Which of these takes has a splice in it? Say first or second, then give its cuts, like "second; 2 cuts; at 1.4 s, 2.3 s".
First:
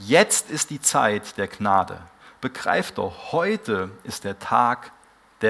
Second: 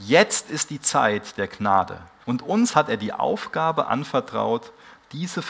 second; 1 cut; at 2.2 s